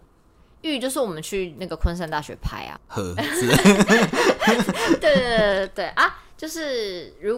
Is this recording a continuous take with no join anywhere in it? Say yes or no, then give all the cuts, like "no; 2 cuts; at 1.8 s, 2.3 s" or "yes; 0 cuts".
no; 1 cut; at 2.8 s